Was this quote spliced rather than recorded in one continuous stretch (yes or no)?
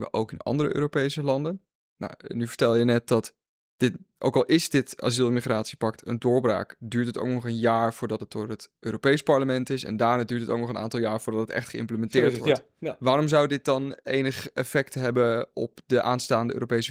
no